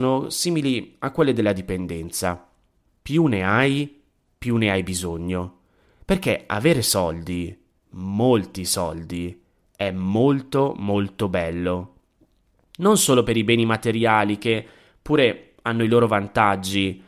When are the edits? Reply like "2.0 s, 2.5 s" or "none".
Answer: none